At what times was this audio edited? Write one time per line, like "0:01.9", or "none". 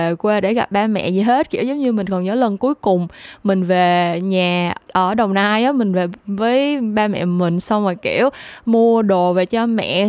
0:04.8